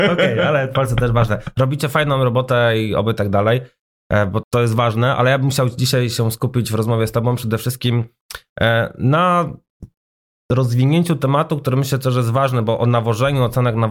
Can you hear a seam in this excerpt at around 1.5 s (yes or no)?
no